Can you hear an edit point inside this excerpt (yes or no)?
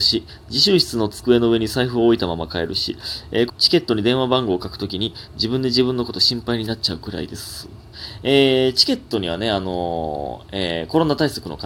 yes